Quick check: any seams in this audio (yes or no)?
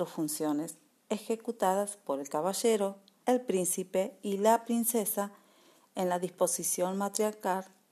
yes